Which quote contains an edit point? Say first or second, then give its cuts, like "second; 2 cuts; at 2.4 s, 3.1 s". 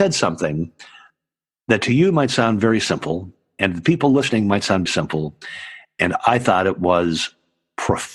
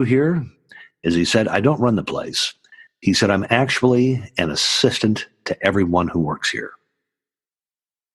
first; 1 cut; at 4.9 s